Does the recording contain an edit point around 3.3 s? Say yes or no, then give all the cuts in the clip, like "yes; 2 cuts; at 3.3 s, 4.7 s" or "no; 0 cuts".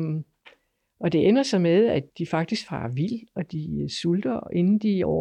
no; 1 cut; at 2.1 s